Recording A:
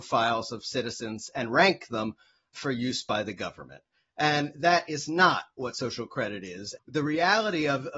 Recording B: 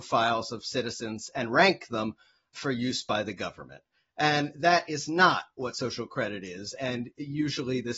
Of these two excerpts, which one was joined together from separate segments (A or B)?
A